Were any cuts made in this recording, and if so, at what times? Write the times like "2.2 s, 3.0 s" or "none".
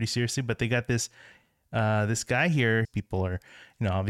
2.8 s